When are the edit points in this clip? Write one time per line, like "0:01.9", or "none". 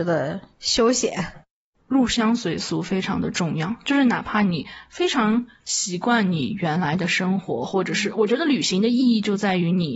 0:01.8